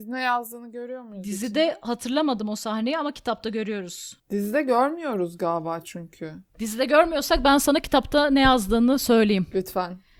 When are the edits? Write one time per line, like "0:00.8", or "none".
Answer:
0:04.2